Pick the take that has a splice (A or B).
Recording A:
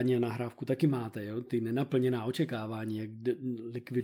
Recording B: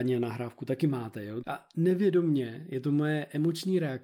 B